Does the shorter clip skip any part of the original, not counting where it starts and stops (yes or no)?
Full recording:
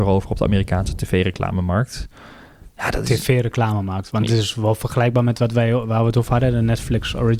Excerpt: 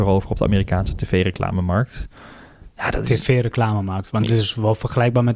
no